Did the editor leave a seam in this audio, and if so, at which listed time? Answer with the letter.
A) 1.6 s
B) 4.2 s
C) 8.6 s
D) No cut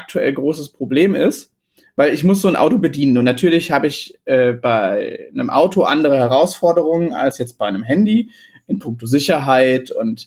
D